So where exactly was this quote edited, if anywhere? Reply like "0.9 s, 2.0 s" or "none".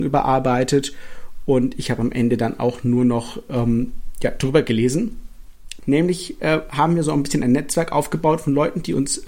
5.8 s